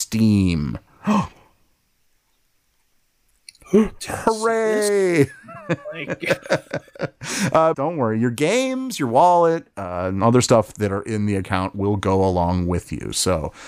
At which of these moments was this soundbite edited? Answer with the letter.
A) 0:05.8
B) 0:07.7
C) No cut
B